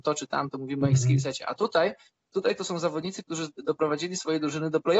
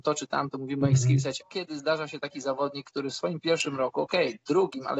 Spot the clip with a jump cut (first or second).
second